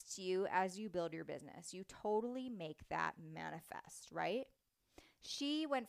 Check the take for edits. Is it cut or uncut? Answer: uncut